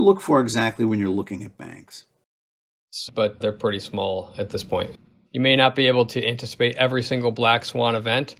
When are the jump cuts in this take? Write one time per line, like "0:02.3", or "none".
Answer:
0:03.1
0:05.3